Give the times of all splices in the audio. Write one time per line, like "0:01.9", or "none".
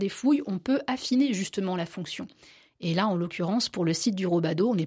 none